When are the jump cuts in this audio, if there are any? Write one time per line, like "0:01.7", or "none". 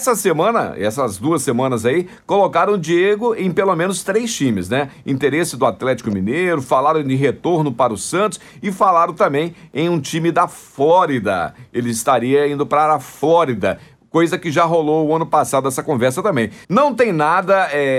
0:16.6